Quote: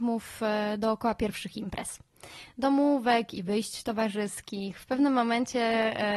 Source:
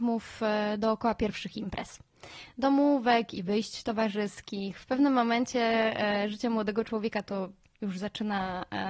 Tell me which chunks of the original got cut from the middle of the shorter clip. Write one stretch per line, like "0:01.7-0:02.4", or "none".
none